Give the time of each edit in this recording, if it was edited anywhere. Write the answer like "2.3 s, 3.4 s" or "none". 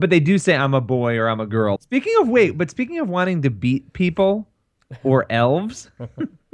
1.8 s